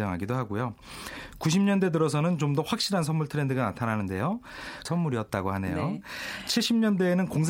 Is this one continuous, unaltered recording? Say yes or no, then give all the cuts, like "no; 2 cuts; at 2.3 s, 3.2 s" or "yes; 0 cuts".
no; 1 cut; at 4.9 s